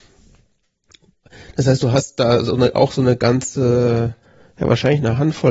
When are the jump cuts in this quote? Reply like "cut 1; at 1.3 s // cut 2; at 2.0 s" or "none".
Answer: none